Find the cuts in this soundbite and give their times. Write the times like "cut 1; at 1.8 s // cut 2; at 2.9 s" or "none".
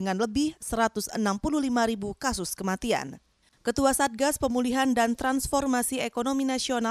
cut 1; at 3.5 s